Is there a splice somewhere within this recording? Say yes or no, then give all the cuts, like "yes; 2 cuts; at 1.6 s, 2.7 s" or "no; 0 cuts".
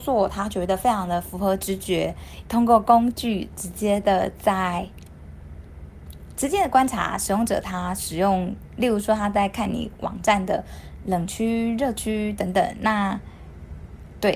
yes; 1 cut; at 2.4 s